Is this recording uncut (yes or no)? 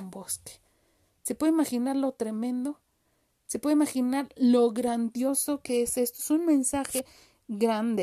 yes